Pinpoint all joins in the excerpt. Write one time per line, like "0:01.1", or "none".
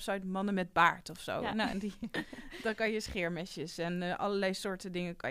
none